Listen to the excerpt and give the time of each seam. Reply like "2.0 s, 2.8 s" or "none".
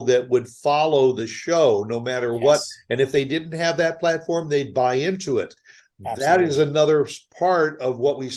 none